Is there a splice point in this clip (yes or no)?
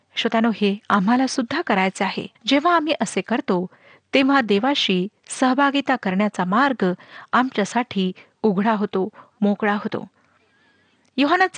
yes